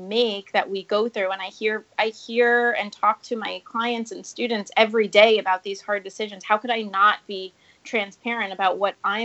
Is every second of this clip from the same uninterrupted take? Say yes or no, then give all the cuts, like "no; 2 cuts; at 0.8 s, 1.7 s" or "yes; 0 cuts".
yes; 0 cuts